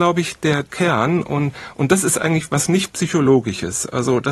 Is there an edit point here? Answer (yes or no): no